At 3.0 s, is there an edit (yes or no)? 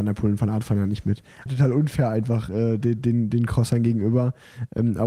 no